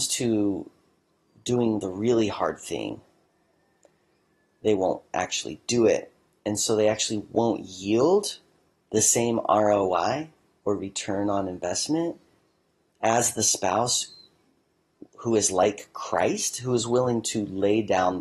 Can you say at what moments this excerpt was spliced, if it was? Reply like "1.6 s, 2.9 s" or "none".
none